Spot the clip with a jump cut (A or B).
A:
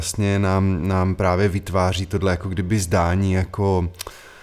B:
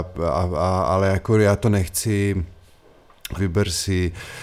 B